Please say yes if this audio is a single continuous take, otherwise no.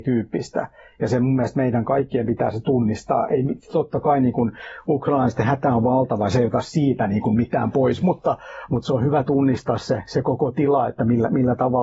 yes